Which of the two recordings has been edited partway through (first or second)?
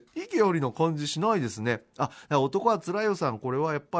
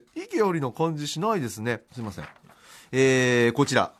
second